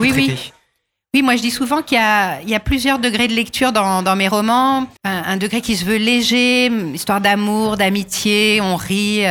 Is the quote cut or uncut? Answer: cut